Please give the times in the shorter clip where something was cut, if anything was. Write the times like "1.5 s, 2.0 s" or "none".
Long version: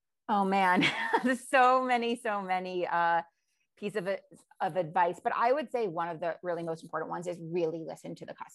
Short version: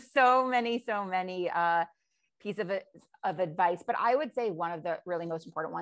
none